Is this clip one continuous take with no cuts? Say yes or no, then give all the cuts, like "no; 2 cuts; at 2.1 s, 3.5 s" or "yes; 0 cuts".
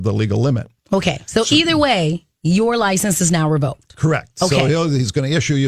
yes; 0 cuts